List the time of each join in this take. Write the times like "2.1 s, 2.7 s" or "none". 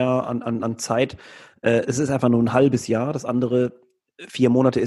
none